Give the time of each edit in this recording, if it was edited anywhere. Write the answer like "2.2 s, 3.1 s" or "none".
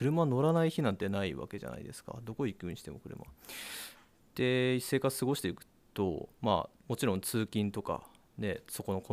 none